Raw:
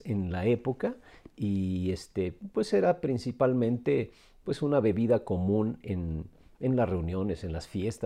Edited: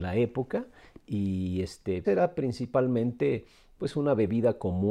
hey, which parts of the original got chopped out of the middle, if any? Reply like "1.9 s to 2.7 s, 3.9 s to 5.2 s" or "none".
2.3 s to 2.7 s